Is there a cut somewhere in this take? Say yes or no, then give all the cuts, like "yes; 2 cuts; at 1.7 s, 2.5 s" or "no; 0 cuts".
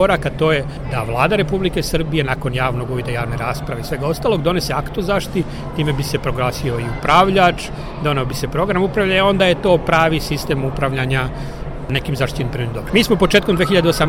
yes; 1 cut; at 12.9 s